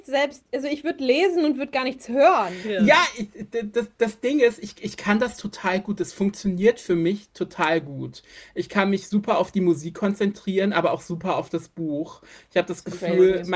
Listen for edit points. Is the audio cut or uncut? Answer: uncut